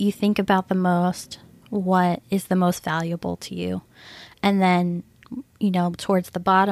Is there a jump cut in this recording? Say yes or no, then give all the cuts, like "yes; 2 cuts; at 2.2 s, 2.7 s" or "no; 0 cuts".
no; 0 cuts